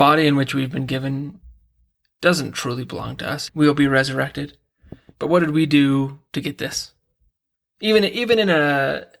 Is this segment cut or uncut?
cut